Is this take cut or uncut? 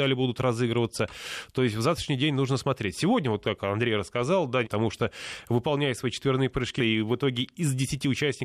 cut